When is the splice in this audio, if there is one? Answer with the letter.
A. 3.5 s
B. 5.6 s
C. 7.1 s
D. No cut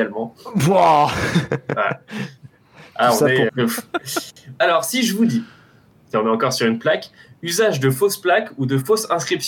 A